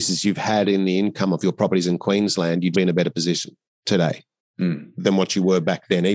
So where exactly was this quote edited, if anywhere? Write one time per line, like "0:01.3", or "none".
0:02.7